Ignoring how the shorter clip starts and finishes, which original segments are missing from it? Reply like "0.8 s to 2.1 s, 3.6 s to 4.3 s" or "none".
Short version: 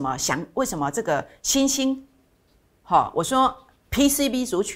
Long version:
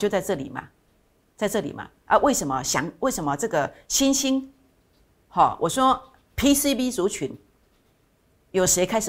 none